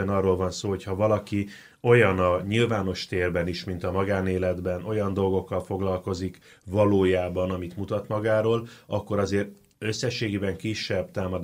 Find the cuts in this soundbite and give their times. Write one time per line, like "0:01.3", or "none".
none